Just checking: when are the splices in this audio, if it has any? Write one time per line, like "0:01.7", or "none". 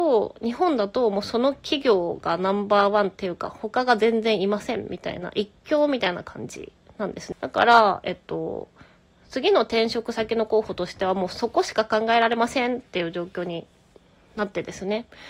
0:07.3